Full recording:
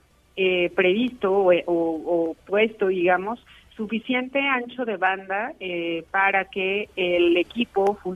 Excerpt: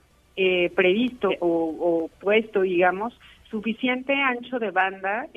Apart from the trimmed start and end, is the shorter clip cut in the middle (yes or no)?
yes